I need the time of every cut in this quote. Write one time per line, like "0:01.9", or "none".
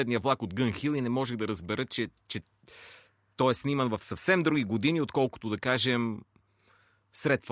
none